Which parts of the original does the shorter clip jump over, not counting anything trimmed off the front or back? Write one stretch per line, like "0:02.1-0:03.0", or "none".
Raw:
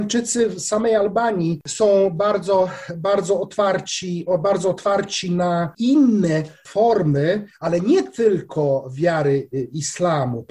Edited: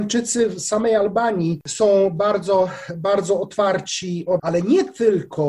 0:04.4-0:07.6